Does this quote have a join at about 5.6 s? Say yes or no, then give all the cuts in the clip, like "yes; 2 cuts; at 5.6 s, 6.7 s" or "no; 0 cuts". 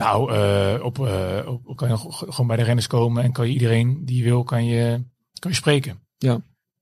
no; 1 cut; at 1.8 s